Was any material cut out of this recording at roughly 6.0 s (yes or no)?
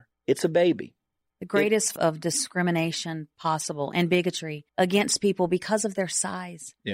no